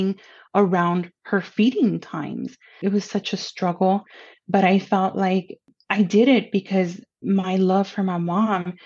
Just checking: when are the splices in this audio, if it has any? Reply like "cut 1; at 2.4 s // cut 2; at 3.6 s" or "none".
none